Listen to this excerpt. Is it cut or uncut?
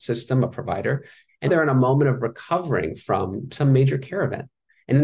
cut